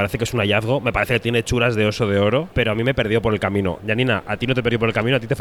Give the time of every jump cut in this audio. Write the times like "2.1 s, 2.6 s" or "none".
2.5 s, 3.8 s